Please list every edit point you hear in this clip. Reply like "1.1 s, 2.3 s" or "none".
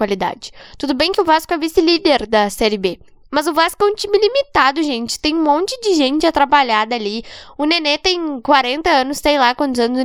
none